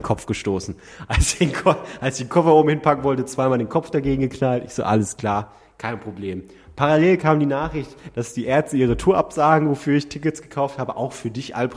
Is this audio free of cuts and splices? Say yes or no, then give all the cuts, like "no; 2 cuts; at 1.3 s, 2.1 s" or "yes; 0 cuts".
yes; 0 cuts